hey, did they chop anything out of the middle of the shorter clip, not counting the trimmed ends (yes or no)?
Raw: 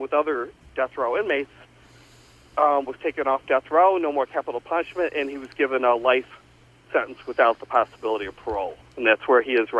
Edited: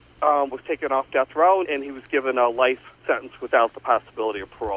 yes